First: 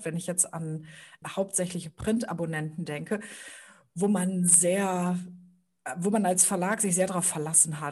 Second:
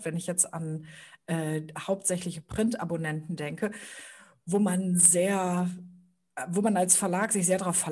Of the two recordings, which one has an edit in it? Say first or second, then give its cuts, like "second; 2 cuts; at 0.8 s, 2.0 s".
first; 1 cut; at 1.2 s